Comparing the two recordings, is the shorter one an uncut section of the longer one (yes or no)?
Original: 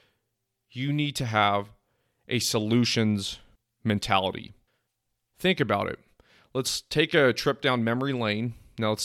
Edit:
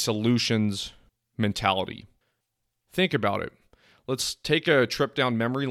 yes